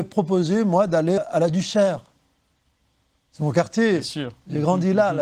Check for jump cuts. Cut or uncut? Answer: cut